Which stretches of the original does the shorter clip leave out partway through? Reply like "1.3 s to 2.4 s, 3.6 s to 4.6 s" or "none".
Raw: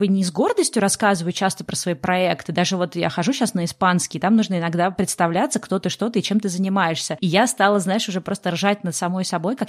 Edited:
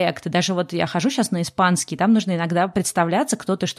none